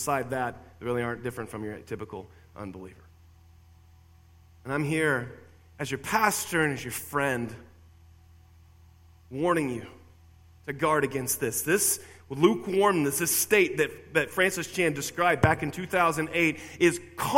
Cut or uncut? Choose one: uncut